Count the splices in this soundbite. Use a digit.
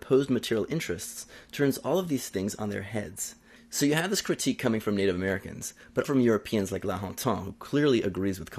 2